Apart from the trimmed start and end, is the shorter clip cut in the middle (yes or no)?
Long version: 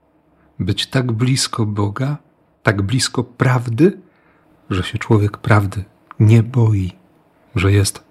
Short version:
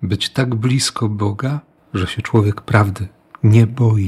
yes